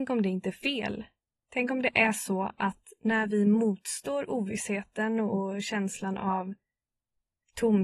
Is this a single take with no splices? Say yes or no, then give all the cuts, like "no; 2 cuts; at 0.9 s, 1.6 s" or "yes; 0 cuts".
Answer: no; 1 cut; at 1.4 s